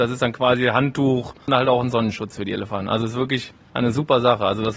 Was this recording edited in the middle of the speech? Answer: no; 0 cuts

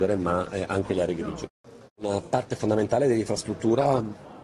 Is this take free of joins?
no; 1 cut; at 1.9 s

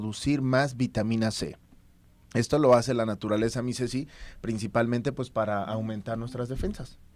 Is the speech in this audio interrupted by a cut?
no; 0 cuts

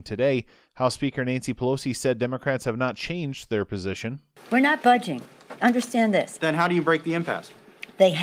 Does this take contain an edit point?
no; 0 cuts

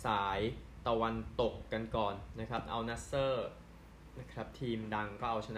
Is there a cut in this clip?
no; 0 cuts

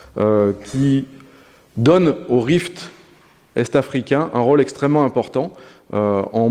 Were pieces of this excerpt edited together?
no; 0 cuts

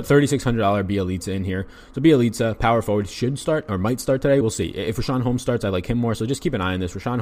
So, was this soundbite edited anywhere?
no; 0 cuts

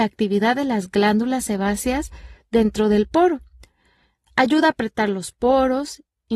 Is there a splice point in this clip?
no; 0 cuts

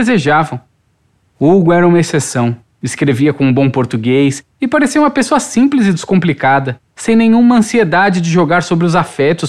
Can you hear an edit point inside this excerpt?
no; 0 cuts

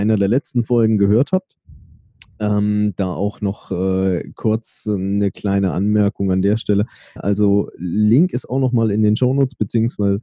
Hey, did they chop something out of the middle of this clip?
yes; 1 cut; at 7.2 s

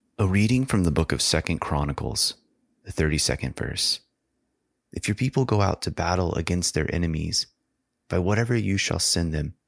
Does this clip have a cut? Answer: yes; 2 cuts; at 2.8 s, 4.8 s

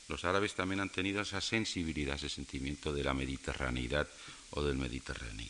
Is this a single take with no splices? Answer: yes; 0 cuts

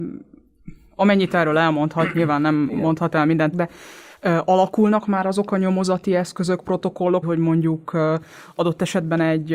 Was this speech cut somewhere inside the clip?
yes; 2 cuts; at 3.5 s, 7.2 s

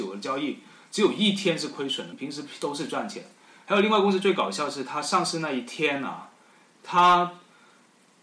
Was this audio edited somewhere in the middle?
yes; 1 cut; at 2.1 s

